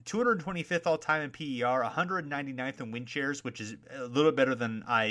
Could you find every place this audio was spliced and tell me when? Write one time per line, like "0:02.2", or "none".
none

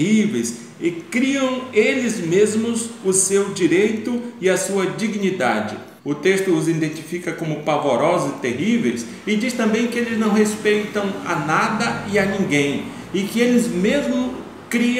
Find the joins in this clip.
0:06.0

